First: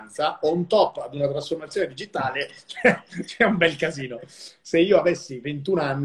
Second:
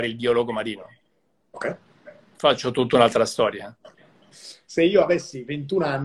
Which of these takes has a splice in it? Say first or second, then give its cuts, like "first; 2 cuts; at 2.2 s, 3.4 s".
second; 1 cut; at 4.3 s